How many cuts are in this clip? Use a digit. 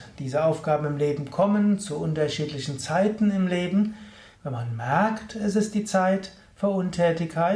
1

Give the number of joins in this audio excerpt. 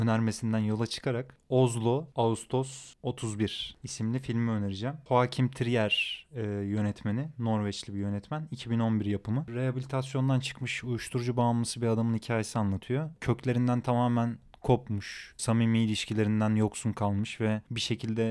1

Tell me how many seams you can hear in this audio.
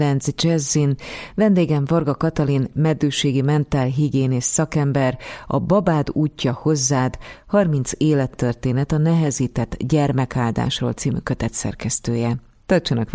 0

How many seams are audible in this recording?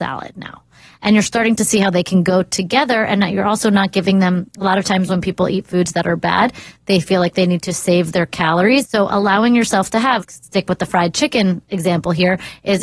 2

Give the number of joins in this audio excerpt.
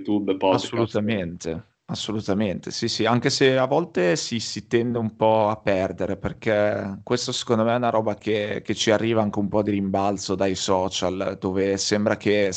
0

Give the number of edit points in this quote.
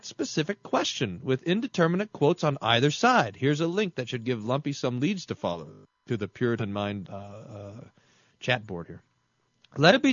1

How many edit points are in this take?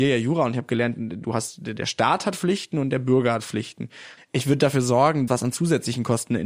2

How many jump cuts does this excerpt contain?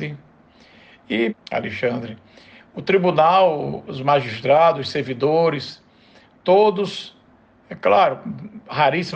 1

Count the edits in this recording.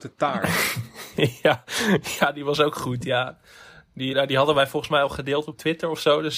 1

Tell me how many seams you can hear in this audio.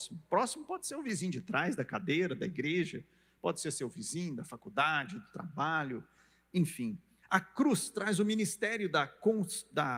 1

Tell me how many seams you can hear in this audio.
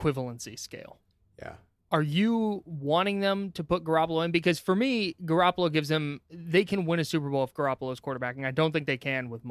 1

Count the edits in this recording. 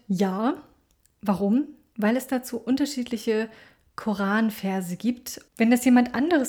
1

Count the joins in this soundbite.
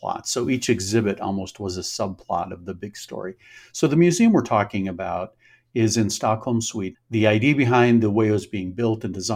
1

